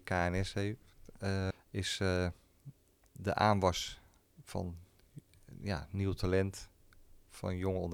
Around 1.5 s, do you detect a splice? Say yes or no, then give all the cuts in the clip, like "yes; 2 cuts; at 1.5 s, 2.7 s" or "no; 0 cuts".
yes; 1 cut; at 1.5 s